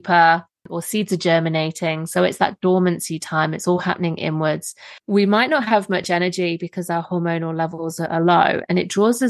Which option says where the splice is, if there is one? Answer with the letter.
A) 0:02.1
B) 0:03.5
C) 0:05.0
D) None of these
C